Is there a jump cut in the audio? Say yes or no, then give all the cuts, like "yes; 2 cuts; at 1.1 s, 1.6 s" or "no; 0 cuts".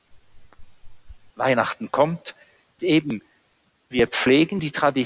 yes; 2 cuts; at 1.3 s, 2.8 s